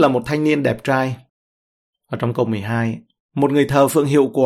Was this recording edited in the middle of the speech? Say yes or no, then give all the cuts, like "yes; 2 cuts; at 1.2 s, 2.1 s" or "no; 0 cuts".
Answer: no; 0 cuts